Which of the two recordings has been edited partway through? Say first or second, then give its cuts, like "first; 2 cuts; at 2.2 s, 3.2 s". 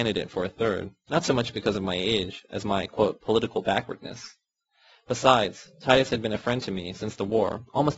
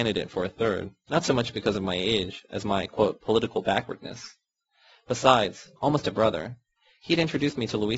second; 1 cut; at 5.8 s